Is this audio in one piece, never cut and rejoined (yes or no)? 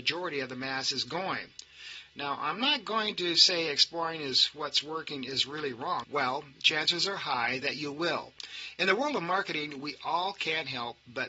no